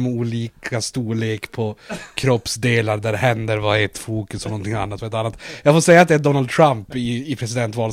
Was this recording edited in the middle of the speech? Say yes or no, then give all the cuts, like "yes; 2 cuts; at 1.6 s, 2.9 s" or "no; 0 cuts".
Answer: no; 0 cuts